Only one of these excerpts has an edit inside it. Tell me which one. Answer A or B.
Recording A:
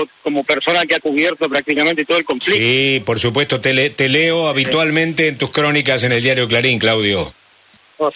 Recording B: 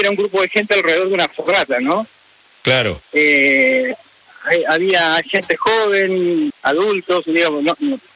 B